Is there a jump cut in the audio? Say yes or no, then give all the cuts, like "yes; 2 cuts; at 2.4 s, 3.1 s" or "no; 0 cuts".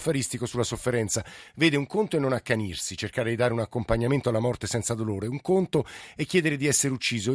no; 0 cuts